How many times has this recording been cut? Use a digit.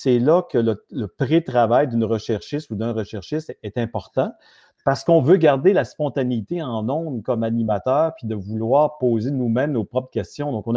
0